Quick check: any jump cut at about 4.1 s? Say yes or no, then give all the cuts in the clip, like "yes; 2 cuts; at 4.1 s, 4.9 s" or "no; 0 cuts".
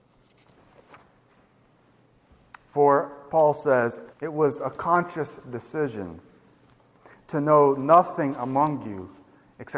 yes; 1 cut; at 4.1 s